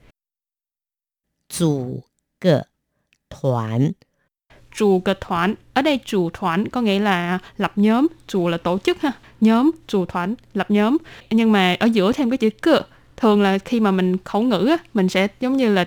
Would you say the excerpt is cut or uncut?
cut